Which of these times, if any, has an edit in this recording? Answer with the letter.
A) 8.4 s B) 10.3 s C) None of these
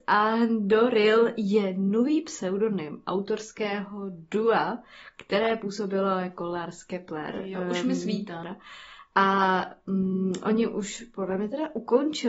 A